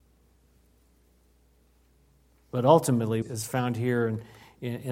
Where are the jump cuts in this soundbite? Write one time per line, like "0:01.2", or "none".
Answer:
0:03.2